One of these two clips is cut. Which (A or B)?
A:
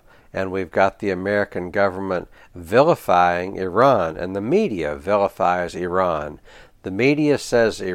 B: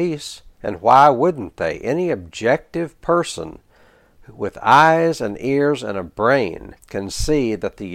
B